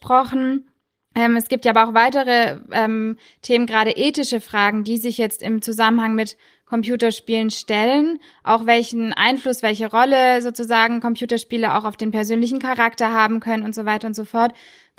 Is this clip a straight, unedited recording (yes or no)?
yes